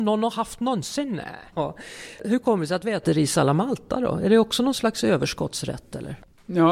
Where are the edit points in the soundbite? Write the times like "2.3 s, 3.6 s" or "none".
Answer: 1.5 s